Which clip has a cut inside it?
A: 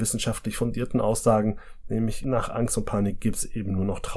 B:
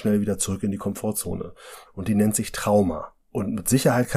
B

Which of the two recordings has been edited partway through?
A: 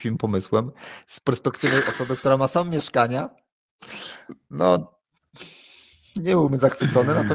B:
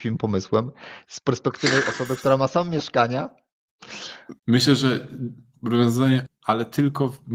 B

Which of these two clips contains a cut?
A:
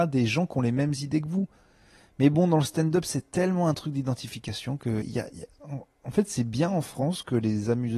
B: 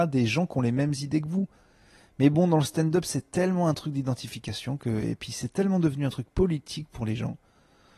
A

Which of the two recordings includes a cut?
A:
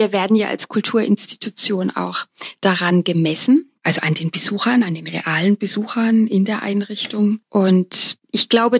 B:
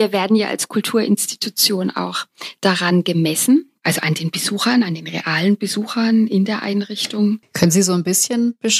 B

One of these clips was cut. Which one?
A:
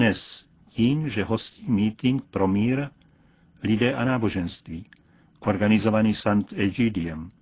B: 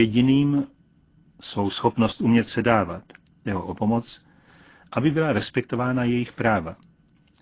B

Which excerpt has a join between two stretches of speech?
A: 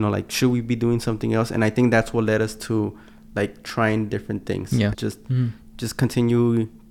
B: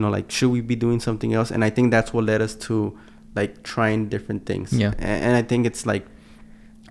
A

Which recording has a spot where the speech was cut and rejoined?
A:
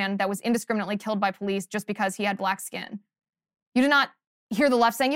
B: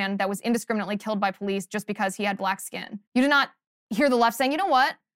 B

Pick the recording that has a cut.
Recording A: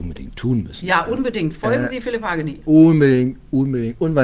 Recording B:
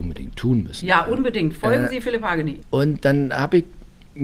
B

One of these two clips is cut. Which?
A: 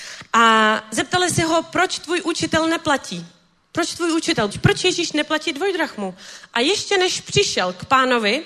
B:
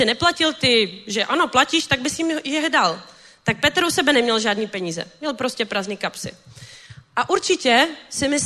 A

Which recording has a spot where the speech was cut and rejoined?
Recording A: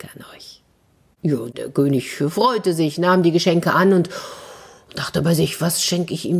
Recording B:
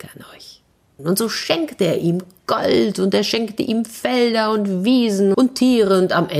B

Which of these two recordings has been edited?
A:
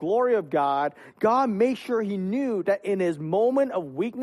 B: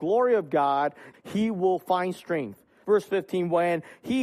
B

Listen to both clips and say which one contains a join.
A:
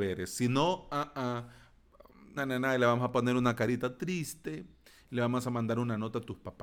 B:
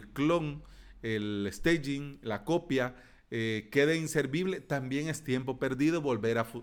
A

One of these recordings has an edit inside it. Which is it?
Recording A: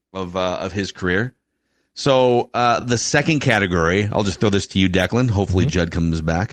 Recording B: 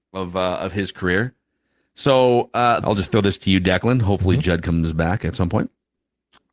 B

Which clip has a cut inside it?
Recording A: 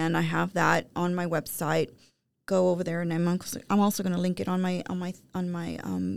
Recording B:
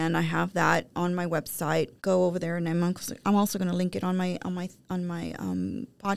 B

